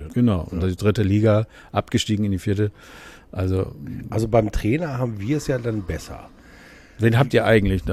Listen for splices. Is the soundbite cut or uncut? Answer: uncut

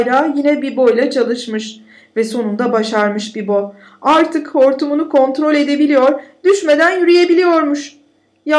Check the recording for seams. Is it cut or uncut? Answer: uncut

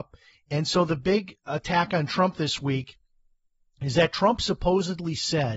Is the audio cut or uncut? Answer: uncut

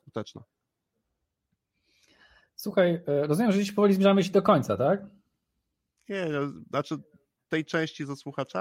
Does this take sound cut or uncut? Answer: uncut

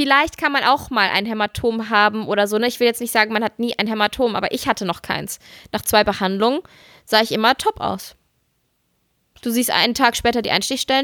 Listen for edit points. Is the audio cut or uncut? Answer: uncut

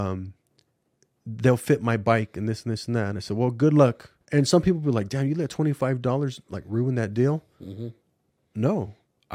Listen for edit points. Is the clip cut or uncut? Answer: cut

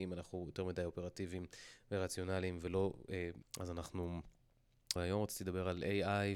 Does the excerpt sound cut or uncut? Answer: cut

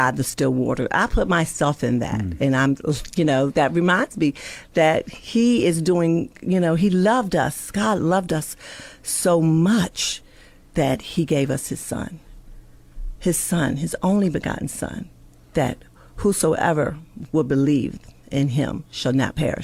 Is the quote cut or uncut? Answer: uncut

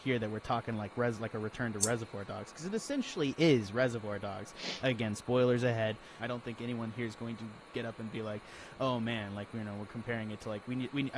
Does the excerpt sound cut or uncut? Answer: cut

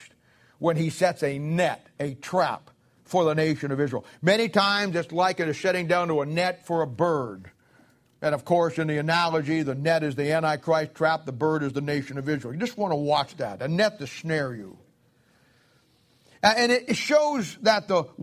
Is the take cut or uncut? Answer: uncut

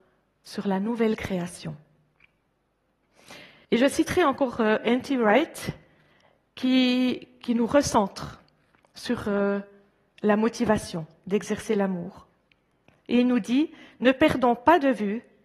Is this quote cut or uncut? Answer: cut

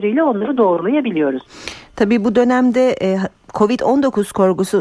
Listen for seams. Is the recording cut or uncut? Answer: uncut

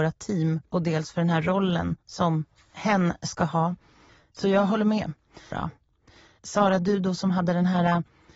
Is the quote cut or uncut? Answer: cut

